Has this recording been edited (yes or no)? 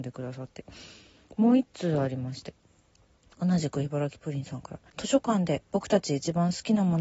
yes